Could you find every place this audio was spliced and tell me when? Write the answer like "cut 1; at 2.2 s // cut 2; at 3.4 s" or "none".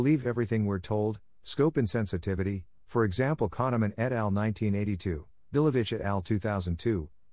cut 1; at 2.8 s